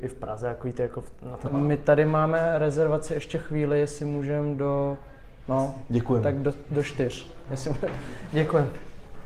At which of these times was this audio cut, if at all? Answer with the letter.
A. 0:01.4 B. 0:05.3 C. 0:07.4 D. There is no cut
A